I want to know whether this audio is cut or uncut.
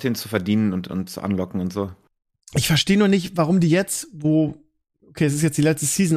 uncut